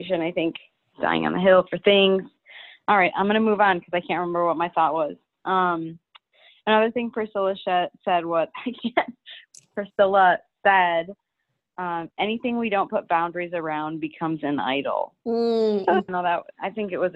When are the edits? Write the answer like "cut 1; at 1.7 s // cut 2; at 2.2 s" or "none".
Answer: cut 1; at 0.9 s // cut 2; at 16.1 s